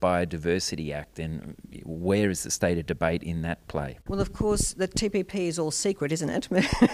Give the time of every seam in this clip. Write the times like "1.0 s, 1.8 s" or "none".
4.0 s